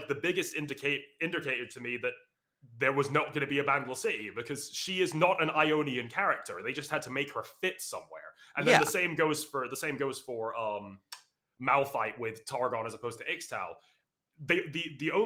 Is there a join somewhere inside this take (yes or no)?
no